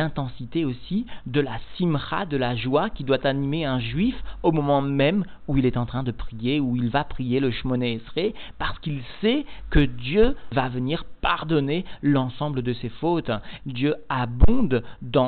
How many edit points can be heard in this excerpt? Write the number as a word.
one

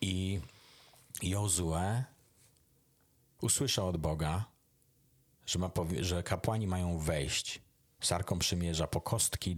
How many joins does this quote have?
zero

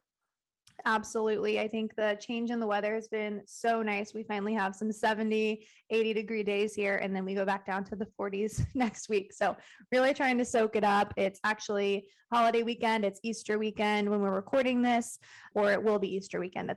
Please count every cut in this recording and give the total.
one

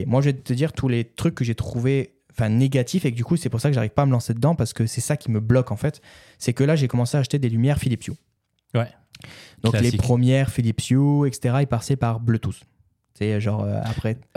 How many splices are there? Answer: zero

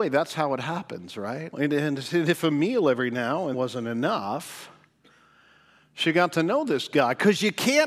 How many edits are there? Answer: two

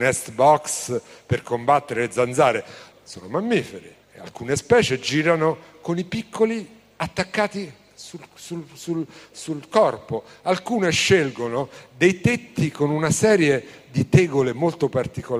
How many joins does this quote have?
two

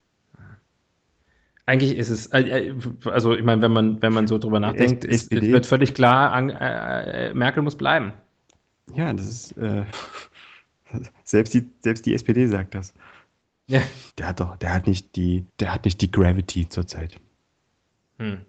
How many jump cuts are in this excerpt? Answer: two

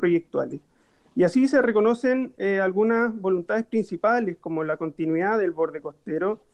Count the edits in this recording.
zero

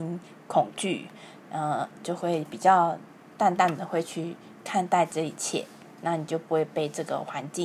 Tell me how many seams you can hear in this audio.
zero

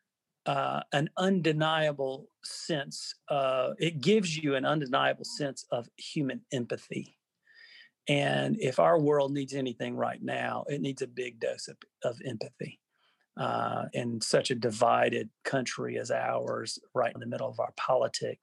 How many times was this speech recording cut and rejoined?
two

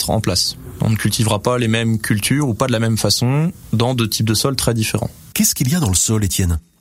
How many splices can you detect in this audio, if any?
one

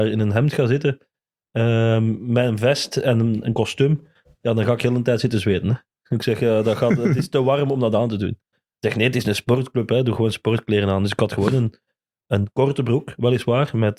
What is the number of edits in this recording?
zero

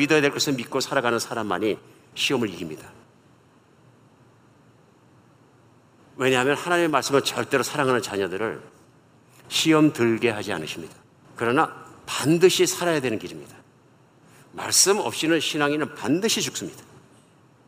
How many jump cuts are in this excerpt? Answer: one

